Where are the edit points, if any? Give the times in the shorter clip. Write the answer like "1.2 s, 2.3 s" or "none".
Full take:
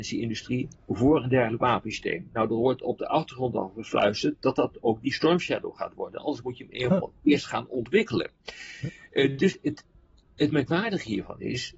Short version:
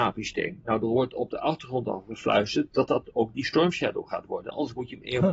none